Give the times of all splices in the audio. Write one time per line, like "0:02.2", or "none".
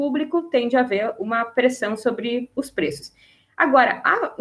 none